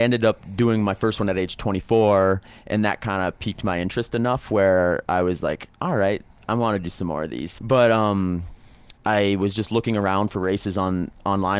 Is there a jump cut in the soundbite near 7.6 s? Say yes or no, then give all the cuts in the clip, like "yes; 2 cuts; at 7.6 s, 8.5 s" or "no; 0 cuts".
yes; 2 cuts; at 7.6 s, 9.0 s